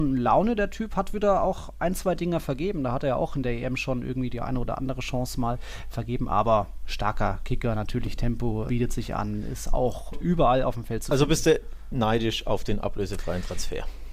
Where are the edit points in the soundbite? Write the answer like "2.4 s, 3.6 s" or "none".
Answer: 8.7 s, 10.1 s